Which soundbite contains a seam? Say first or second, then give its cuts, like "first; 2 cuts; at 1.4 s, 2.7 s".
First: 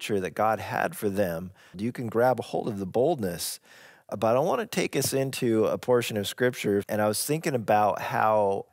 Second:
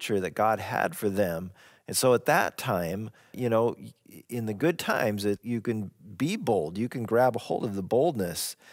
first; 2 cuts; at 1.7 s, 6.8 s